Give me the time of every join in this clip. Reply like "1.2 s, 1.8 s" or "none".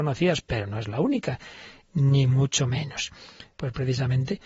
3.5 s